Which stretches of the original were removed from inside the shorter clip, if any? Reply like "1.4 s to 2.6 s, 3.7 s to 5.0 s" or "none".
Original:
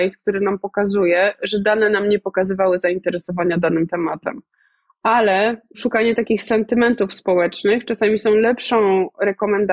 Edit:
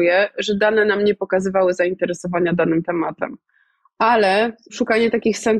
none